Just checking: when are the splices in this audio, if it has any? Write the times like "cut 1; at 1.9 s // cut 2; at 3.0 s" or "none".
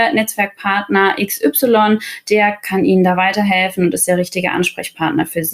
none